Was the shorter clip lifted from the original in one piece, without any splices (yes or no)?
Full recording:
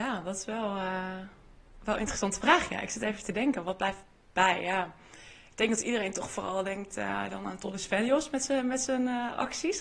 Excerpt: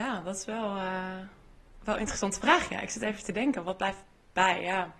yes